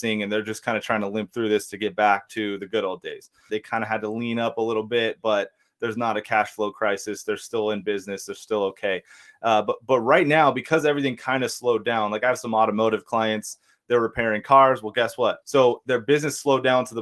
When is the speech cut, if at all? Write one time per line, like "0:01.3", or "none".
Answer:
0:03.5
0:15.4